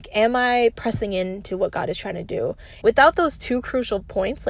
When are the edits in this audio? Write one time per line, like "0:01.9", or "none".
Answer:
0:02.8